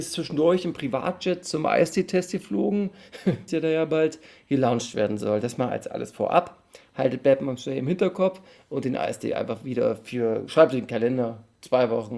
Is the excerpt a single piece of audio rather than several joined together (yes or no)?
no